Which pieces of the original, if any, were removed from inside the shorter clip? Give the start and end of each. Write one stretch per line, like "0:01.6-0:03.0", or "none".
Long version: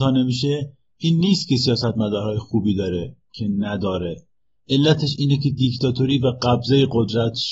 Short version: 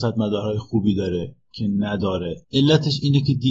0:04.2-0:04.6